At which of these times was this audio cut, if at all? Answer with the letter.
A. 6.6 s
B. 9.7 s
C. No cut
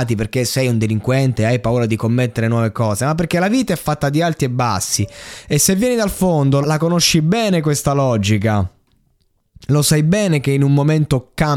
A